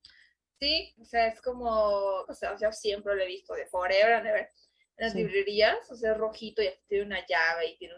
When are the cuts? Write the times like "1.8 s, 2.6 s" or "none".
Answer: 1.0 s, 2.2 s